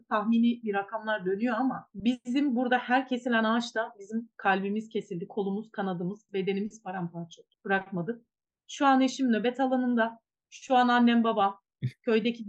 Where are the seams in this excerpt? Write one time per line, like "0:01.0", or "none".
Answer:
0:06.3
0:07.6

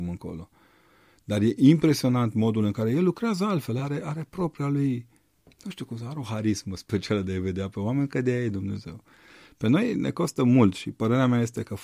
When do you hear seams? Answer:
none

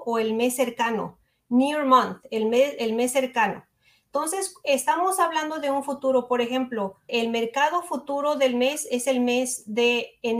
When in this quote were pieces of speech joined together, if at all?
0:07.1

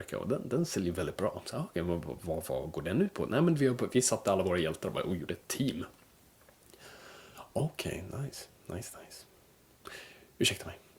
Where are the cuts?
none

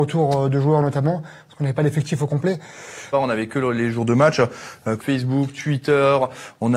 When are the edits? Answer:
0:03.1
0:05.0

